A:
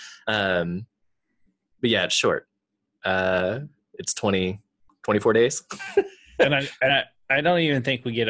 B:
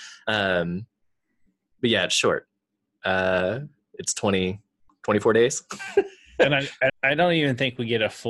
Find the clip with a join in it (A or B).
B